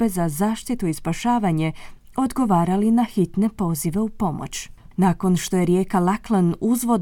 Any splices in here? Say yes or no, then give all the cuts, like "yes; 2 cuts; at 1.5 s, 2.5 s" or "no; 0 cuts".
yes; 1 cut; at 4.9 s